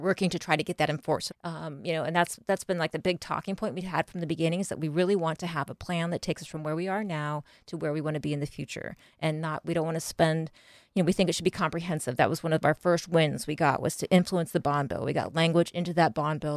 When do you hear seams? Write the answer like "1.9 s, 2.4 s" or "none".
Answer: 1.3 s